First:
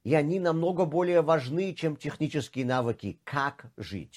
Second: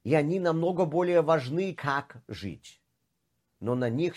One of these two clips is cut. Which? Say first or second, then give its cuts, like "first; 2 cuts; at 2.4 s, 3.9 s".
second; 1 cut; at 1.8 s